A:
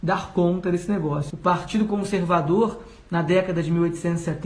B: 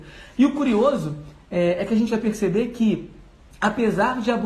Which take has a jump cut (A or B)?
A